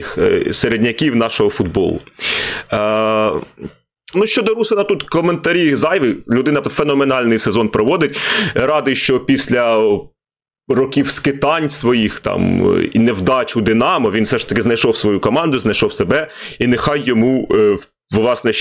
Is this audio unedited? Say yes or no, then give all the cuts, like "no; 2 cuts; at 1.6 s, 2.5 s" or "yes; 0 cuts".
no; 2 cuts; at 4.1 s, 6.6 s